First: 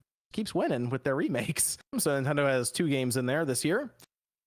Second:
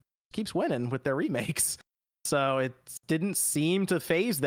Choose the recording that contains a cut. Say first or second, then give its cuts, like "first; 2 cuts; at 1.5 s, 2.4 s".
first; 1 cut; at 1.9 s